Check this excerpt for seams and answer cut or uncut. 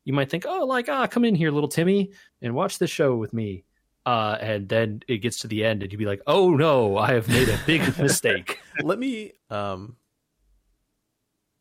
cut